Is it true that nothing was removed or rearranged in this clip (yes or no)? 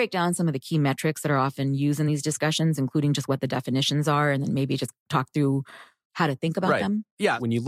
yes